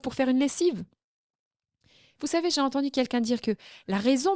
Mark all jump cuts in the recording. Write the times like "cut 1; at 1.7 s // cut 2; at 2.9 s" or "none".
cut 1; at 2.2 s